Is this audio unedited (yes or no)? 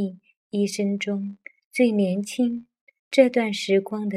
no